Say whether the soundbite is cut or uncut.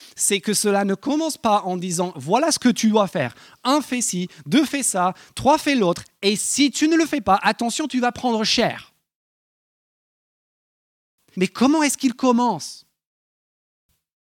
cut